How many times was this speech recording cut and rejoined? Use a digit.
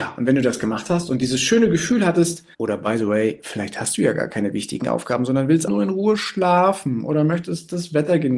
2